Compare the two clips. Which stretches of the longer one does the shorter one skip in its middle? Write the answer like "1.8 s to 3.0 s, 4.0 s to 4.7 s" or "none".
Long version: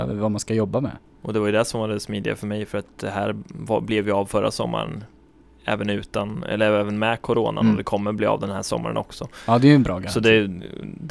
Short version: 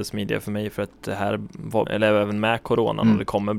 3.8 s to 6.4 s